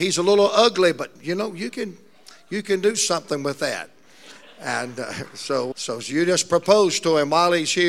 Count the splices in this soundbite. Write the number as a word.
one